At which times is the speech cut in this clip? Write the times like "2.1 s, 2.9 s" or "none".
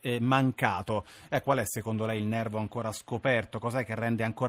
1.4 s